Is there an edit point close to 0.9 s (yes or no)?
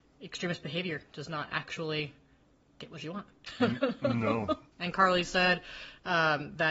no